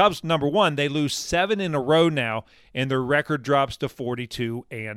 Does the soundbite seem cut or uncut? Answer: uncut